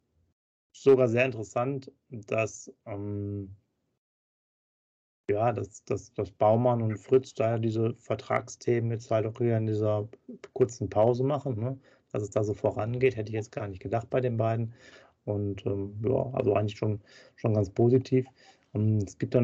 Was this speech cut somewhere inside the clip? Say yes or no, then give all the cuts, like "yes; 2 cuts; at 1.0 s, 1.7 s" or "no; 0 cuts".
no; 0 cuts